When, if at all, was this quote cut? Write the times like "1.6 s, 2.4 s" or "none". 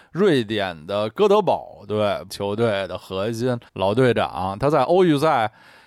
2.3 s, 3.7 s

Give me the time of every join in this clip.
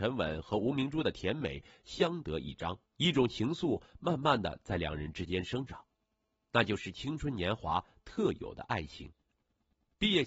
2.9 s

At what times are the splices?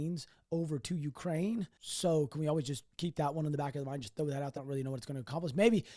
4.6 s

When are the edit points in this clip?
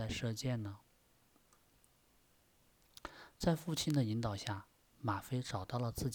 none

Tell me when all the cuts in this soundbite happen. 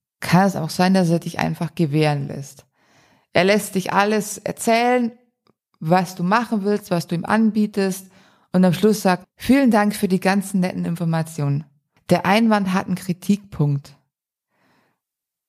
9.2 s, 12.0 s

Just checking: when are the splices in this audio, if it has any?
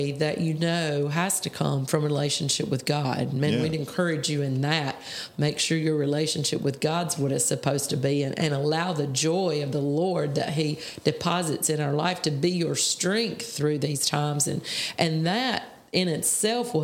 none

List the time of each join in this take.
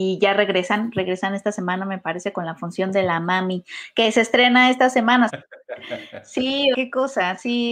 5.3 s, 6.7 s

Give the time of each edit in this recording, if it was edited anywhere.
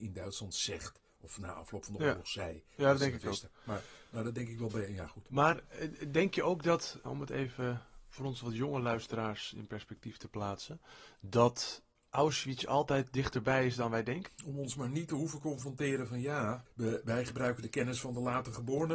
7.1 s, 14.3 s, 16.7 s

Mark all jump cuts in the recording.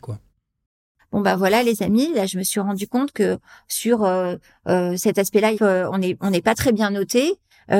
1.0 s, 5.5 s

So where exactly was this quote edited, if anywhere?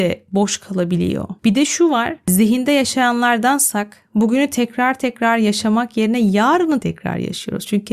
6.8 s

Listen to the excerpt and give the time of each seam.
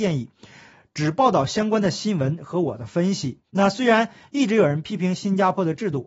3.5 s

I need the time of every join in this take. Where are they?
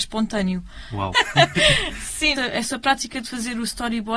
1.1 s, 2.4 s

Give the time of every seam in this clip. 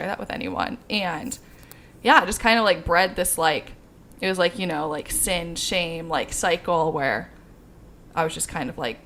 none

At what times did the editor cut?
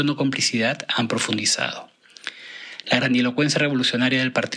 2.8 s

